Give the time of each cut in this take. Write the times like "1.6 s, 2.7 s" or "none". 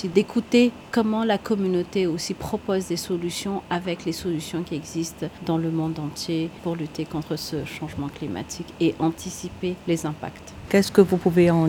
10.7 s